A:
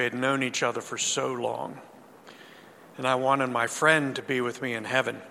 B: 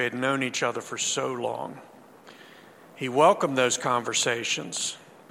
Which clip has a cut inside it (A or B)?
A